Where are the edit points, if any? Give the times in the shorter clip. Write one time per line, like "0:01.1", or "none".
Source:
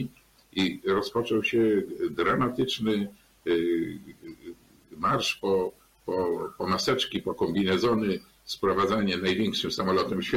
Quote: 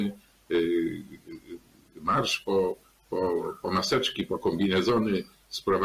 none

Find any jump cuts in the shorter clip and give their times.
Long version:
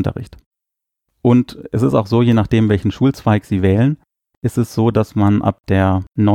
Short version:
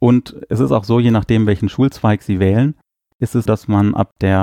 0:03.5

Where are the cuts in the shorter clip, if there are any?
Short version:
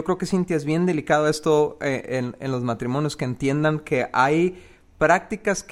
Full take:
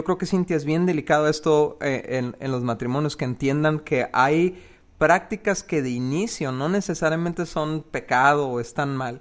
none

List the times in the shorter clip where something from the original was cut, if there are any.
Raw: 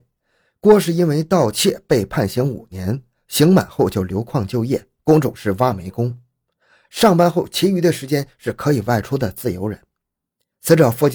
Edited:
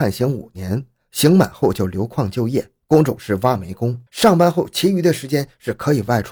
0:04.1

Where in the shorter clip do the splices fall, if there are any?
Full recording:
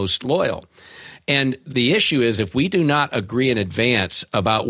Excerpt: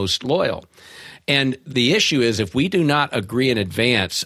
none

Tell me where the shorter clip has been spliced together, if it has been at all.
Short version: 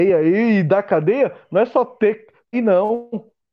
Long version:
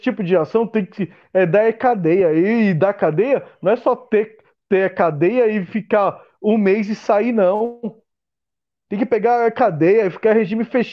0:02.5

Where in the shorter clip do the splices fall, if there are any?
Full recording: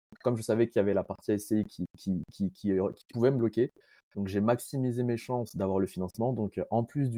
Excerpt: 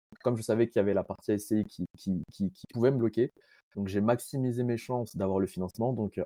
0:02.6

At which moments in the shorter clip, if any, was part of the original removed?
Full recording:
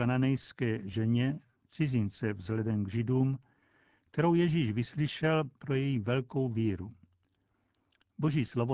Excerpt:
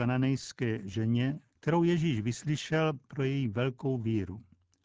0:01.5

